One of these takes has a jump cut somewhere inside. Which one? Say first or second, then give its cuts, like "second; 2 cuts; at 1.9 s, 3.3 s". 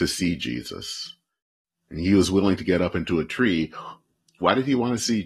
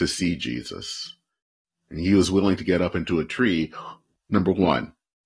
second; 1 cut; at 4.2 s